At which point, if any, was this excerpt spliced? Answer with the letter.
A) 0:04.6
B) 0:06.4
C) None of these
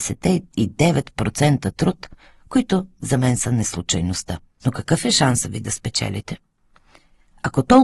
A